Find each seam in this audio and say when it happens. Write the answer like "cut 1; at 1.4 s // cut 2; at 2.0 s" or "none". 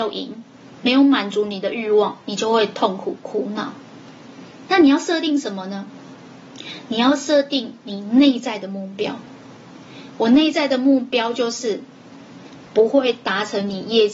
cut 1; at 12.7 s